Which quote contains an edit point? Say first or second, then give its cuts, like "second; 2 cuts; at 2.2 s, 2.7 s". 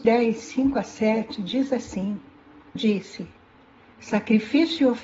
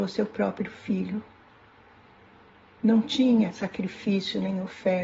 first; 1 cut; at 2.8 s